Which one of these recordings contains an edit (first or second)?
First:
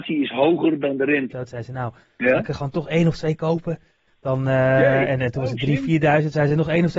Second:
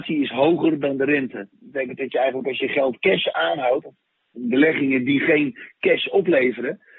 first